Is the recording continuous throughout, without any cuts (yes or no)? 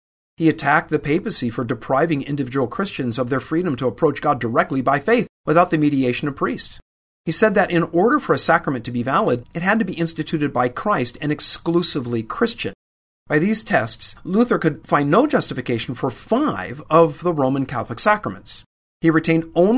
yes